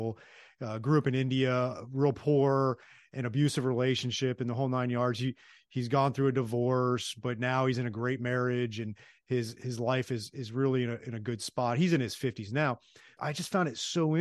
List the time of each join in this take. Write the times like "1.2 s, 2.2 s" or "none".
none